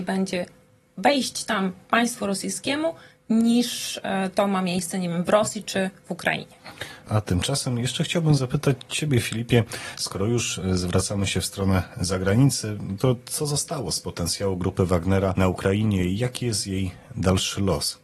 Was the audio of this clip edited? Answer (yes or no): yes